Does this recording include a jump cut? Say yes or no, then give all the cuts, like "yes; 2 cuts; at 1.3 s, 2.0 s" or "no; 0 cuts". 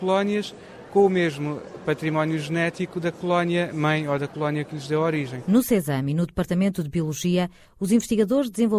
no; 0 cuts